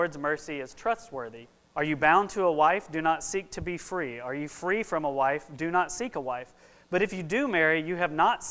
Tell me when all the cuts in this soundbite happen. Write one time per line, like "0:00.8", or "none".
0:01.6